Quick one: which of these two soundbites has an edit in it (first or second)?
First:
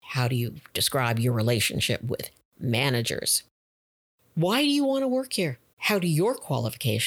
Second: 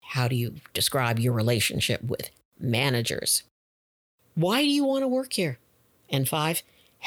first